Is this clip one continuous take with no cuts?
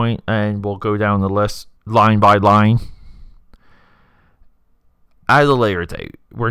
no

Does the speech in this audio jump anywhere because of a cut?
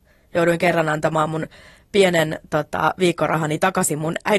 no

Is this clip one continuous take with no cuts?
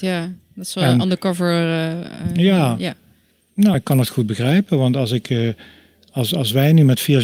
yes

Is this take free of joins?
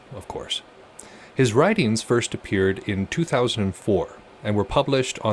yes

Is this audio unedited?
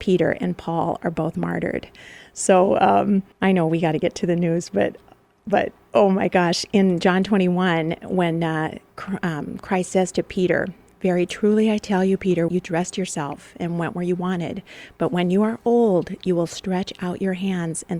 no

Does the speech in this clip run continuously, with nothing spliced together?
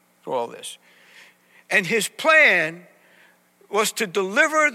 yes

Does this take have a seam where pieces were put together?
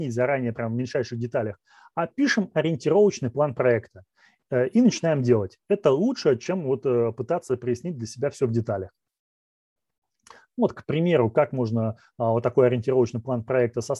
no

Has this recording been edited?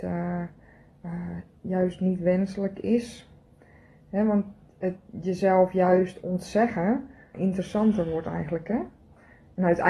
yes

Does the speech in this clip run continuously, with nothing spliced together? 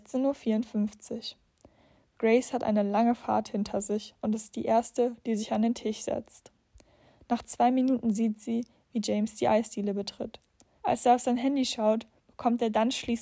no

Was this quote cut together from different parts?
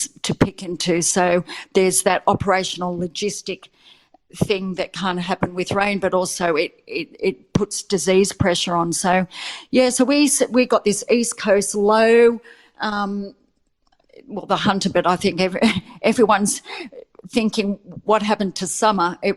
no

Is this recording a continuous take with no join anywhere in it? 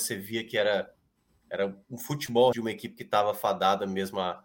no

